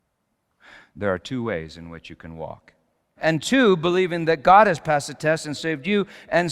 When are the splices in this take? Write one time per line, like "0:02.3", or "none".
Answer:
0:03.2
0:05.6

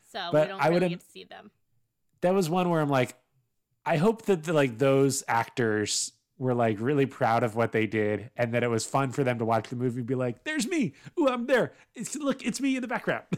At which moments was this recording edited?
none

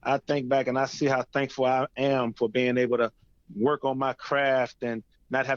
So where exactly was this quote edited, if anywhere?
0:01.9

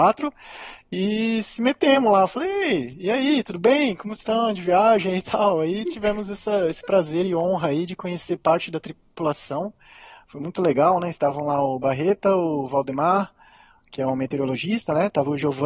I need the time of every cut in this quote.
none

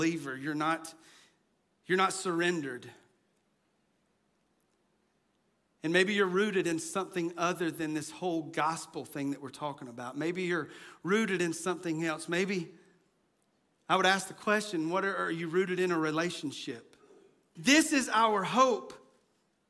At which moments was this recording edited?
0:17.6

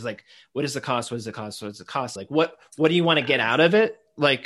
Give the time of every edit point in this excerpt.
0:02.2

